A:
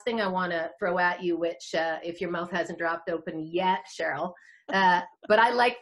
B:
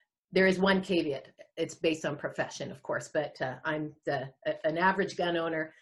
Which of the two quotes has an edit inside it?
B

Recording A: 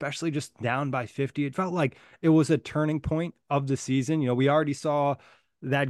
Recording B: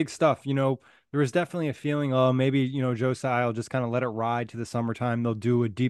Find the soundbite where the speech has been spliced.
A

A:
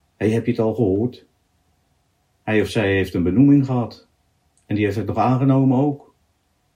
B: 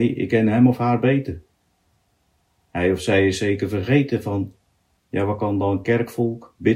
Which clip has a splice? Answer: B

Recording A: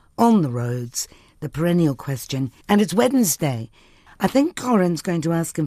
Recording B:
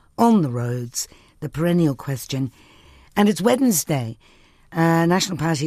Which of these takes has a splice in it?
A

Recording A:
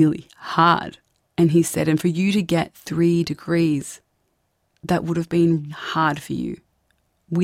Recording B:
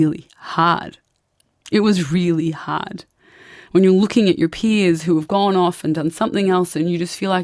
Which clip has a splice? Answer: A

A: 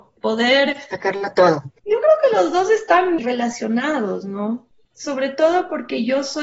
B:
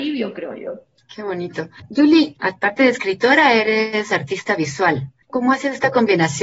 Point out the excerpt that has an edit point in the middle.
A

